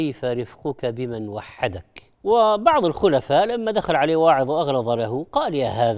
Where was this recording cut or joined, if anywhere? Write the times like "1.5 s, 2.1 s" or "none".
2.1 s